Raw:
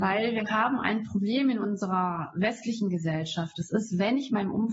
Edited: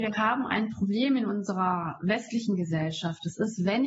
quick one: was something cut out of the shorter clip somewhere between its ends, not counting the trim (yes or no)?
no